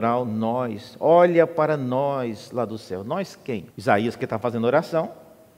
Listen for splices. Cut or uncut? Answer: cut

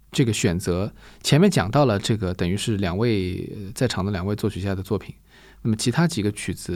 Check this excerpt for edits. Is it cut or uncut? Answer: uncut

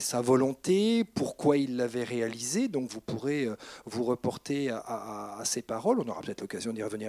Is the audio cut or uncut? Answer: uncut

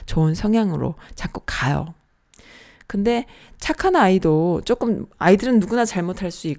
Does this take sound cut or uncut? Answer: uncut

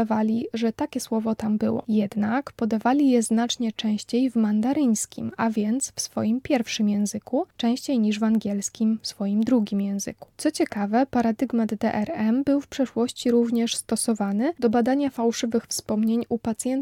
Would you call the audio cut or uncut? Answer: uncut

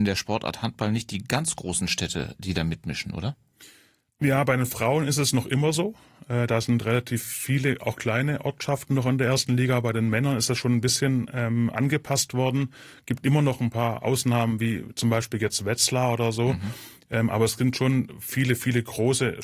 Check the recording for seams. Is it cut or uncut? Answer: uncut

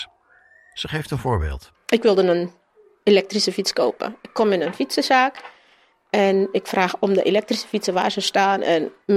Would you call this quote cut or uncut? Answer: uncut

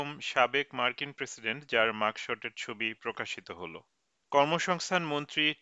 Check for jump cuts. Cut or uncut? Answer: uncut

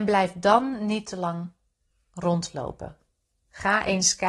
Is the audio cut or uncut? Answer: uncut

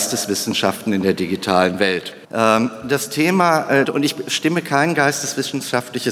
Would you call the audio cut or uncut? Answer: cut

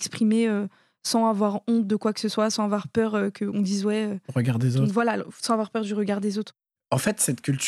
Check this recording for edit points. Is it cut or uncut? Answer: cut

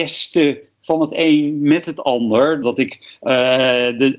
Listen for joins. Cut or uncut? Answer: cut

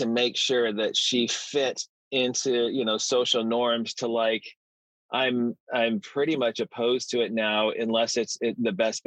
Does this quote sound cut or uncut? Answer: uncut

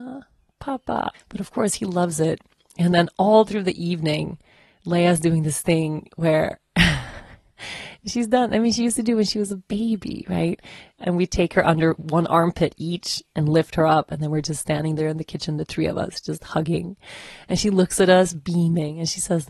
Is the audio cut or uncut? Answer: cut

